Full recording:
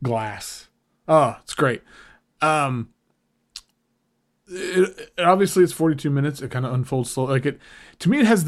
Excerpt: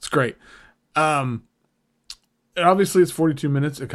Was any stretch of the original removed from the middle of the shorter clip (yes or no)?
yes